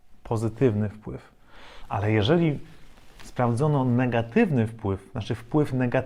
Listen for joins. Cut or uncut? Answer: uncut